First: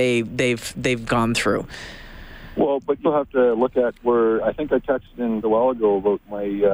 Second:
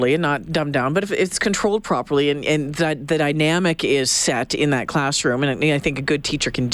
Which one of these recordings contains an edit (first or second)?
first